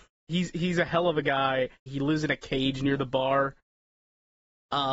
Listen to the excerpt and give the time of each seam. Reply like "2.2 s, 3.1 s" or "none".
1.9 s

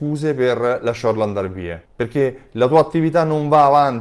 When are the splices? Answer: 1.9 s

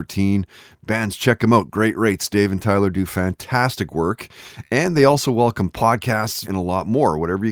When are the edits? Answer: 6.4 s

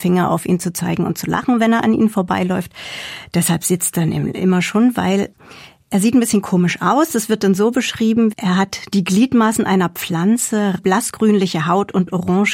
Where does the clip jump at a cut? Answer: 8.3 s, 10.8 s

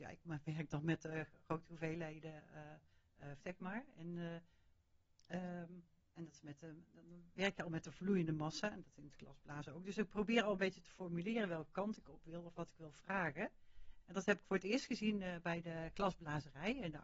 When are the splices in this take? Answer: 3.4 s, 14.0 s

